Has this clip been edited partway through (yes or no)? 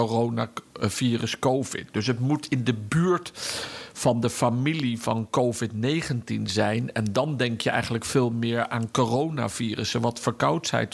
no